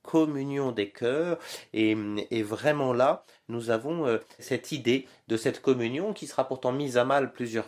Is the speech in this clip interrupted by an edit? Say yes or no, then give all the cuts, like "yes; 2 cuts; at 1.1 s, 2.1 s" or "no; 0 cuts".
no; 0 cuts